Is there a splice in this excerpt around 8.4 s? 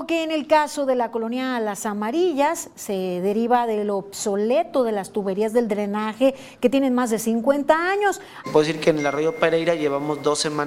yes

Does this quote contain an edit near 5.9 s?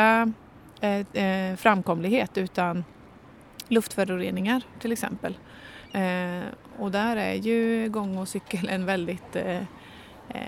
yes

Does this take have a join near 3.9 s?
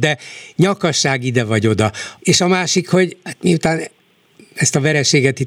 no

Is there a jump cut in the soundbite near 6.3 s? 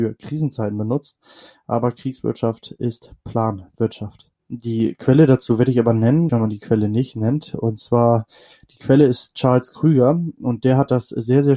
yes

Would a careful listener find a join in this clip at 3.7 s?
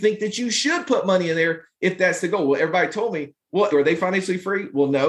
yes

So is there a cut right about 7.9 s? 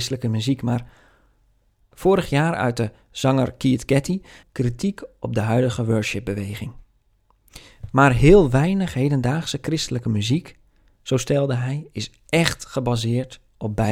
no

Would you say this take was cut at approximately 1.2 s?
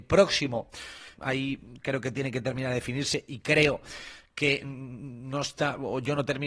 yes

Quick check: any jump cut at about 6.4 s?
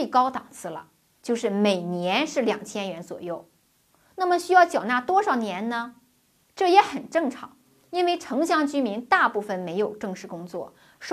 yes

